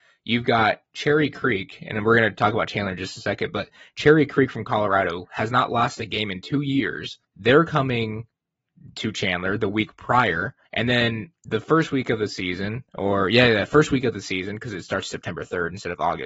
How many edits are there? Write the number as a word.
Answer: two